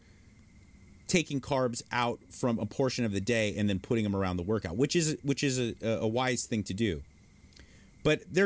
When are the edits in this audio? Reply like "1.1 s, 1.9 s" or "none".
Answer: none